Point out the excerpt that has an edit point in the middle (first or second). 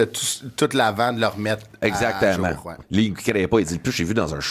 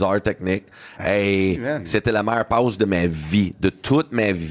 first